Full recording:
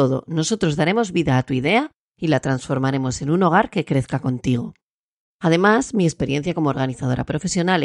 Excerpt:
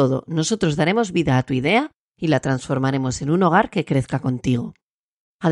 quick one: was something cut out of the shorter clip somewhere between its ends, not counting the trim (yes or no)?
no